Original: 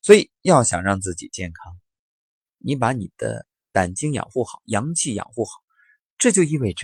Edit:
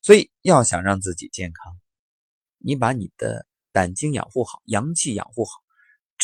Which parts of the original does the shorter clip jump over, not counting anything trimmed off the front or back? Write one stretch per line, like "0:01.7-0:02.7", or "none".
none